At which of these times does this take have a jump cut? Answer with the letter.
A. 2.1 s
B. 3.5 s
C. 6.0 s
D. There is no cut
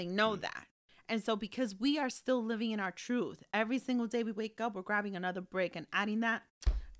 D